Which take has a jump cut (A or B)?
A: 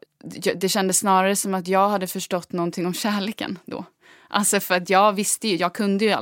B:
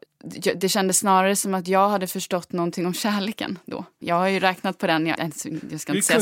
B